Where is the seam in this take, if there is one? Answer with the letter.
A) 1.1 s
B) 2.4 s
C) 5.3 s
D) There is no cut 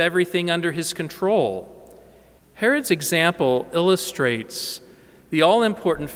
B